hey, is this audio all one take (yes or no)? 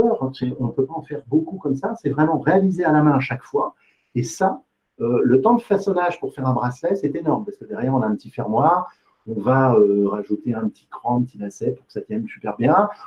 yes